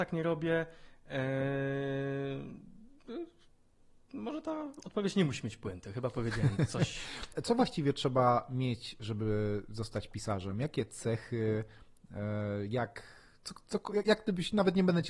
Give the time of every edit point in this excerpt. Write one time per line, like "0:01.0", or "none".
0:07.3